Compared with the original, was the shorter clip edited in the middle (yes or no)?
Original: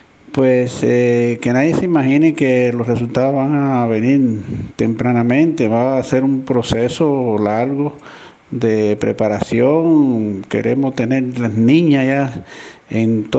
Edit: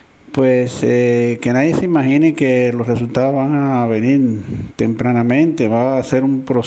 no